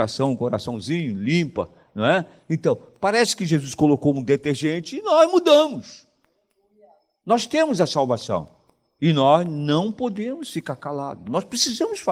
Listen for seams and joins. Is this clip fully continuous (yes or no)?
yes